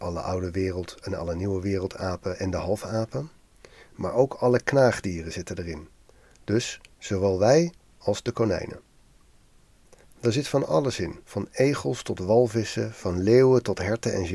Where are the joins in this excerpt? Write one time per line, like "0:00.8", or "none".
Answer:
0:10.0
0:11.2